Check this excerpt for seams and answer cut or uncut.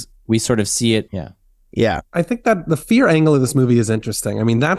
cut